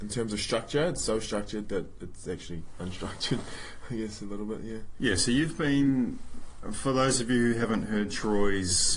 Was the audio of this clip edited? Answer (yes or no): no